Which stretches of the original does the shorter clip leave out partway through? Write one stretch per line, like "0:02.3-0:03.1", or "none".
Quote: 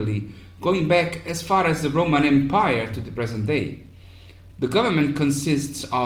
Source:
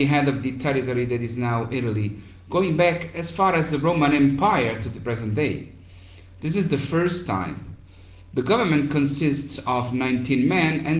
0:06.4-0:08.3